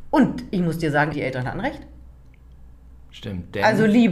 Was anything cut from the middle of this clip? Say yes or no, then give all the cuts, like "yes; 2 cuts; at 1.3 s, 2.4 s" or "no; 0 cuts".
yes; 1 cut; at 1.1 s